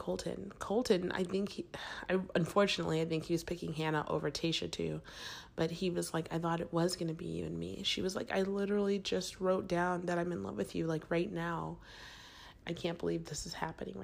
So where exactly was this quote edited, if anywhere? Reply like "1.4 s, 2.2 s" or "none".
12.6 s

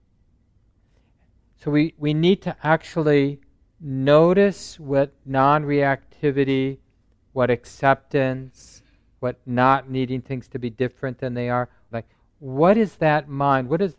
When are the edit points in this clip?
11.9 s

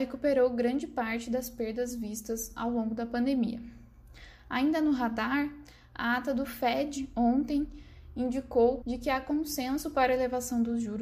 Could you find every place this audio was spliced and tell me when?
8.8 s

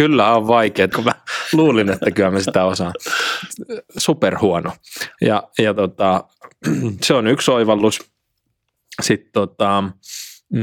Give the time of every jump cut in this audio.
0.9 s

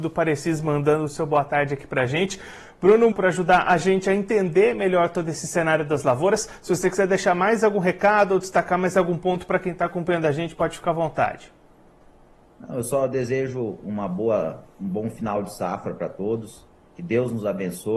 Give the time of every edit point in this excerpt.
3.1 s

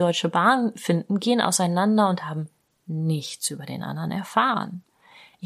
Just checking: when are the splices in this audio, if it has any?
none

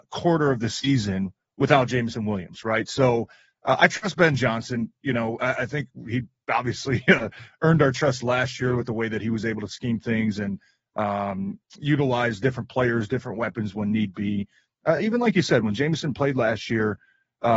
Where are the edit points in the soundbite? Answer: none

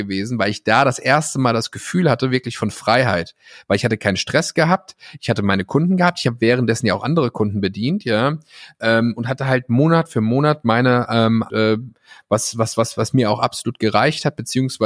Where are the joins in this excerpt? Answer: 11.5 s

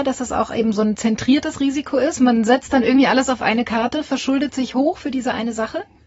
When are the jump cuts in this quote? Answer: none

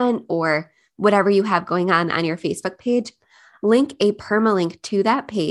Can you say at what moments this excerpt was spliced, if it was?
none

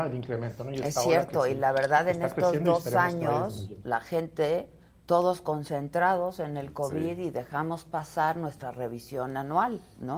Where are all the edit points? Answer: none

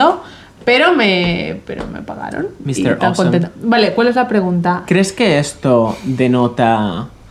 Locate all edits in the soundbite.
4.8 s

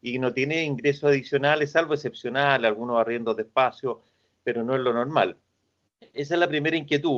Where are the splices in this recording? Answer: none

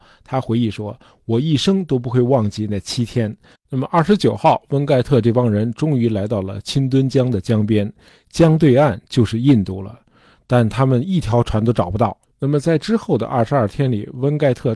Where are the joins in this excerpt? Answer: 3.6 s, 12.3 s

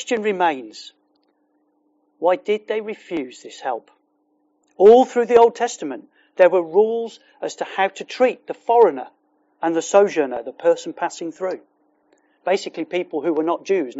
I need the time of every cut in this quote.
4.6 s

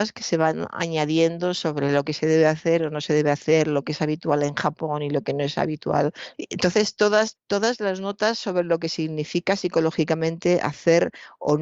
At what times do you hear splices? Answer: 6.3 s, 7.4 s

